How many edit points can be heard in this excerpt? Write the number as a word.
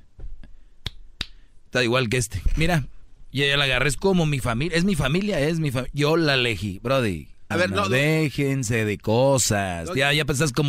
one